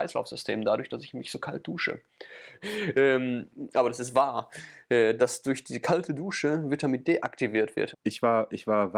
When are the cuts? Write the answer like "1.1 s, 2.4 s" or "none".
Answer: 2.6 s, 7.9 s